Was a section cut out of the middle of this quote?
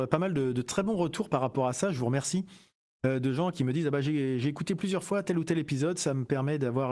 no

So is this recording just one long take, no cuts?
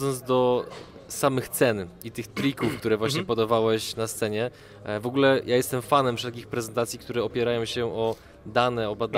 yes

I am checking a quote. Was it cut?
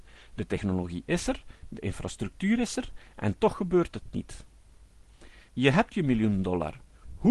no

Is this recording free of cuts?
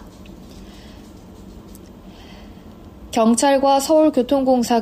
yes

